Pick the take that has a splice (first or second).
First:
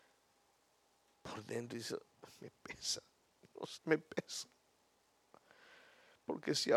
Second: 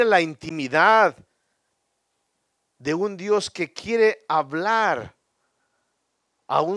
first